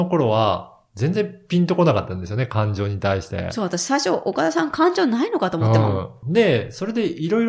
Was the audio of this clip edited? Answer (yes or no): yes